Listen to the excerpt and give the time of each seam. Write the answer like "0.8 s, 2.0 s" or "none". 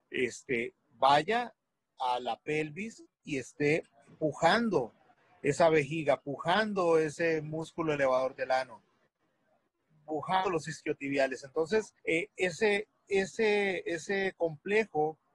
12.0 s